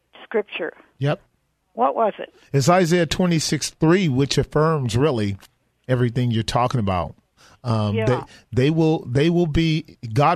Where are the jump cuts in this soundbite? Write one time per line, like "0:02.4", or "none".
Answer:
none